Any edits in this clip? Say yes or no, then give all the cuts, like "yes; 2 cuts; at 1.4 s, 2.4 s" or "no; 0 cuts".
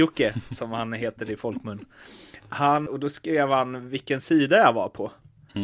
yes; 1 cut; at 2.9 s